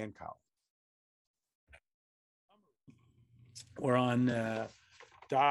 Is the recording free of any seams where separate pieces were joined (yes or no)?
yes